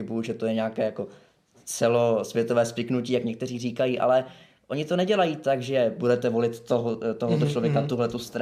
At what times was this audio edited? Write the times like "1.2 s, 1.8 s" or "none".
none

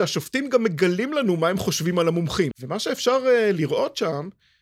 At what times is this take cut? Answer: 2.5 s

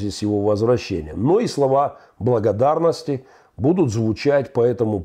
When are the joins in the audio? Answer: none

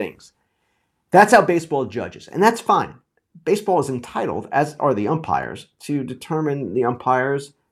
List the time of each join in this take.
none

